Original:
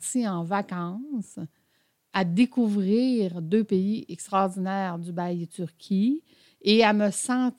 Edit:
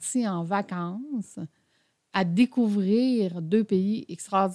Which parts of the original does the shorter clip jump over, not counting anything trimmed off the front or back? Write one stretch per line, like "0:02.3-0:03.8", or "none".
none